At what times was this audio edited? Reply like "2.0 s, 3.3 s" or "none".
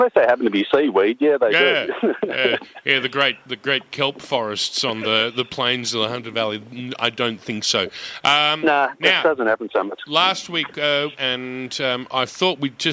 11.1 s